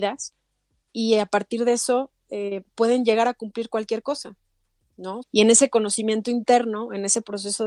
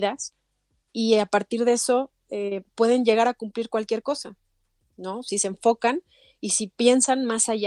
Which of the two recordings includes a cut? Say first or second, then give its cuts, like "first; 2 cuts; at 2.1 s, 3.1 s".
first; 1 cut; at 5.2 s